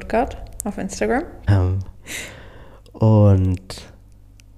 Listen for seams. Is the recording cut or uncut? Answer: cut